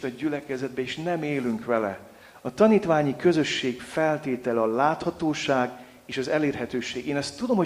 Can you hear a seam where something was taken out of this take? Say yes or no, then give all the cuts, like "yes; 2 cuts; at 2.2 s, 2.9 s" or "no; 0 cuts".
no; 0 cuts